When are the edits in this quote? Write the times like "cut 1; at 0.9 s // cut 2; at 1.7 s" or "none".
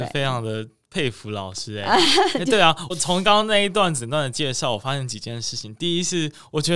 cut 1; at 2.9 s